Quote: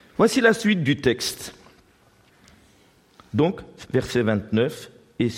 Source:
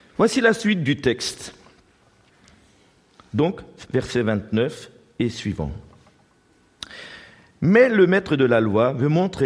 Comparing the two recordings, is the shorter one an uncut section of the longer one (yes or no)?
yes